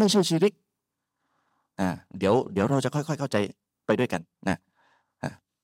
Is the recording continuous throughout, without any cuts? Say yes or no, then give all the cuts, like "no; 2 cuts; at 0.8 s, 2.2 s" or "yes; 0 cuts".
yes; 0 cuts